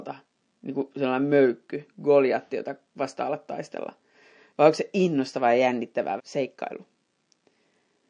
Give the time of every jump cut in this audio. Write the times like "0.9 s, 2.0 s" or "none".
6.2 s